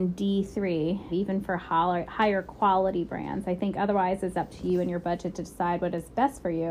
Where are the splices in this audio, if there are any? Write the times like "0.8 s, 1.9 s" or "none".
1.1 s